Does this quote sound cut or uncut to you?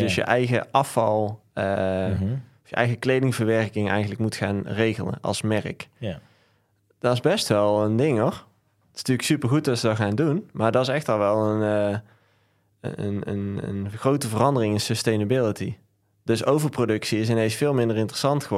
uncut